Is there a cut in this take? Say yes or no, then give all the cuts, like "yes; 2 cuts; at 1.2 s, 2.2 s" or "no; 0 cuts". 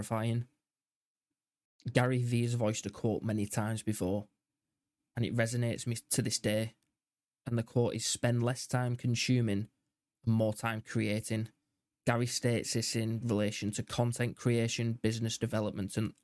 no; 0 cuts